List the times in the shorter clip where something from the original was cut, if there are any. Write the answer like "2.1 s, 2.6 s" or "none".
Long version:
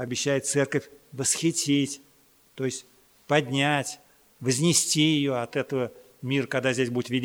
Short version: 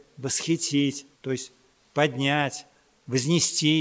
1.1 s